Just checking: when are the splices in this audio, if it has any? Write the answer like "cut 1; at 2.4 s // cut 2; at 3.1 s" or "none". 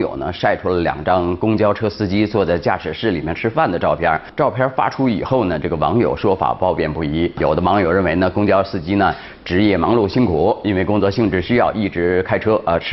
none